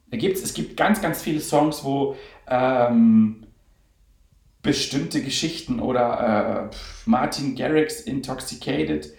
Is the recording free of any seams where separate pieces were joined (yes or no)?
yes